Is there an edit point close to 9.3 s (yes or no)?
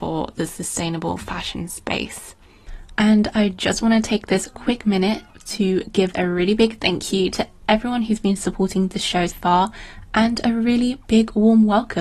yes